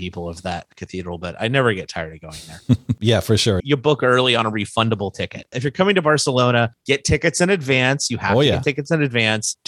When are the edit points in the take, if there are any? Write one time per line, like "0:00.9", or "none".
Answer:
0:03.6
0:05.5

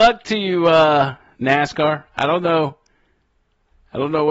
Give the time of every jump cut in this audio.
none

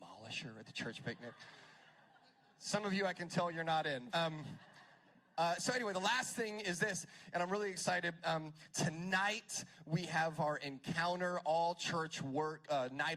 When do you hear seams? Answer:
0:04.1

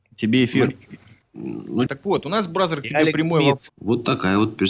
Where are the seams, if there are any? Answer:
0:01.9
0:03.7

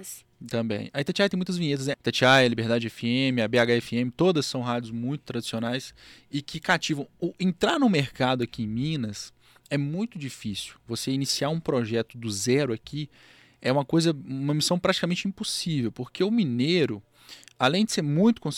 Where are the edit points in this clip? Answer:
0:01.9

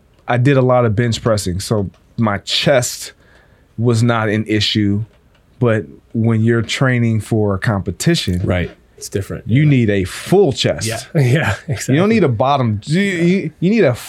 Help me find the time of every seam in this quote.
none

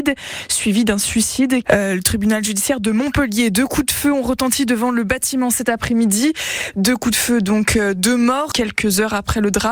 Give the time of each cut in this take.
0:01.6
0:08.5

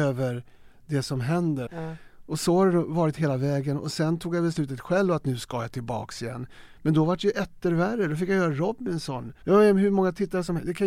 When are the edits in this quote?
0:01.7
0:09.4

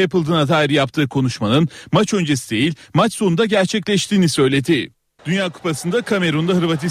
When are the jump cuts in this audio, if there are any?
0:05.2

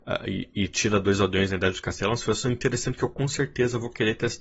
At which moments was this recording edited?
none

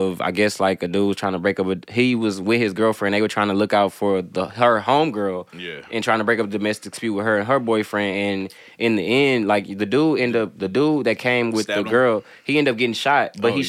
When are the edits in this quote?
none

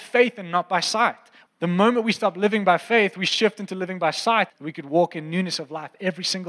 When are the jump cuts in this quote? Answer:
0:01.5
0:04.5

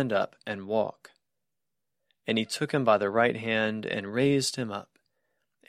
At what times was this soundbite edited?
none

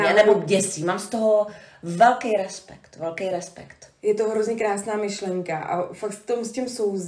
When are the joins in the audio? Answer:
none

